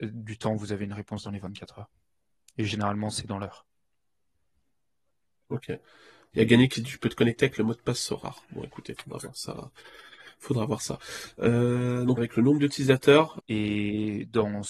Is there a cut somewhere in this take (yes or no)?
yes